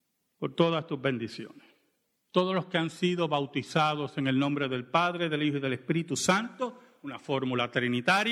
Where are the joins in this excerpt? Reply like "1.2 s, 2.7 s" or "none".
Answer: 2.2 s